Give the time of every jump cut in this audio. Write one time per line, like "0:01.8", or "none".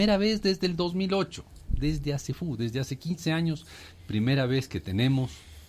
none